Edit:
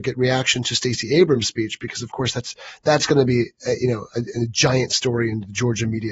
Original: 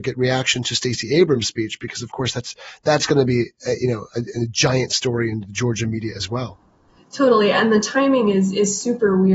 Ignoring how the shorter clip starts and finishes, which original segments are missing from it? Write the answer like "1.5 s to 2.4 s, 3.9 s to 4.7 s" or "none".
none